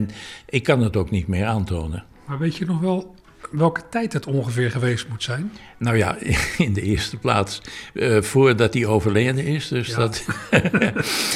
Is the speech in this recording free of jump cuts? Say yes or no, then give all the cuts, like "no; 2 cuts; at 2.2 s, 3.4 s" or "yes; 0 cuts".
yes; 0 cuts